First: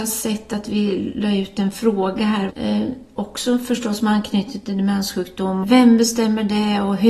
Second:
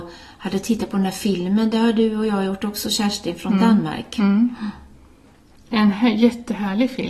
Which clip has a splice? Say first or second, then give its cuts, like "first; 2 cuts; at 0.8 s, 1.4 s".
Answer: first; 2 cuts; at 2.5 s, 5.6 s